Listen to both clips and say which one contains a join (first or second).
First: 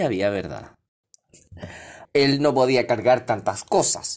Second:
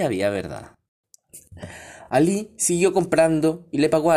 first